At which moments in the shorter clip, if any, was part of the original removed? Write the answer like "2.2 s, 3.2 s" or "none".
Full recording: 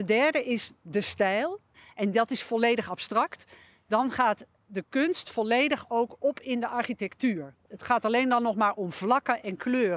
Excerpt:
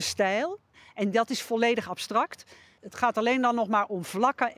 2.8 s